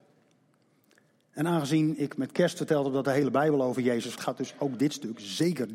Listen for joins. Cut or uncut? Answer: cut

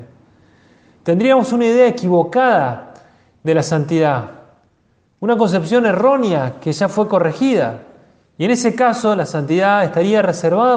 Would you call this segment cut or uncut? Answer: cut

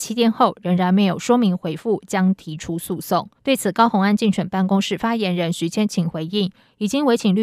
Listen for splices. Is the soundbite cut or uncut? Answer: cut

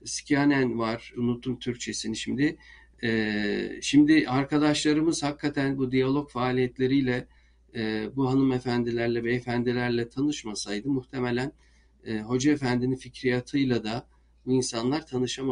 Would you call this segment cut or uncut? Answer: cut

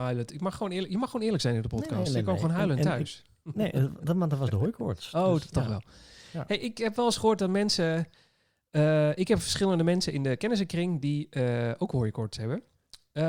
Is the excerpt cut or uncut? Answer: uncut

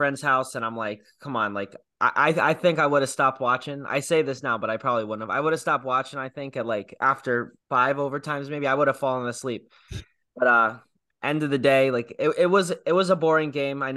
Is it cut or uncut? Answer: cut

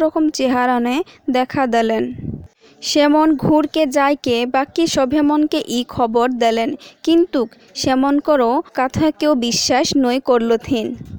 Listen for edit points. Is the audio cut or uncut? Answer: cut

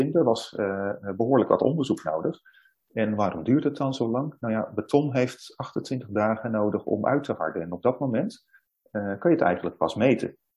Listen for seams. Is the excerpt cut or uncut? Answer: uncut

